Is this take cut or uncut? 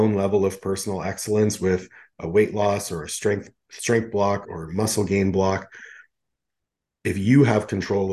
cut